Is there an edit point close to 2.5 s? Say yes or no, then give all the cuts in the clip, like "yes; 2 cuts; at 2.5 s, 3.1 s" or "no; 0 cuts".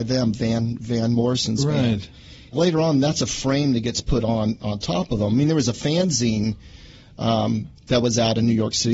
yes; 1 cut; at 2.5 s